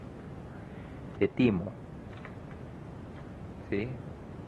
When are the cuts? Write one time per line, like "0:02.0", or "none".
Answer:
0:01.2